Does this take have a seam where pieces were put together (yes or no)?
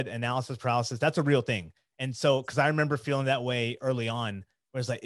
no